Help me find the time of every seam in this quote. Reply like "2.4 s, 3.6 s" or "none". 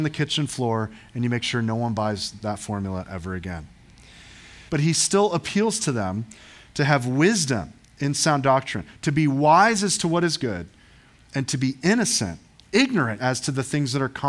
4.7 s, 13.2 s